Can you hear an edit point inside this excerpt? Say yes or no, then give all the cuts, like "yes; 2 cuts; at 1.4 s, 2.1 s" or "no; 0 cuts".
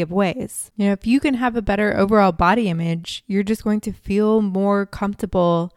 no; 0 cuts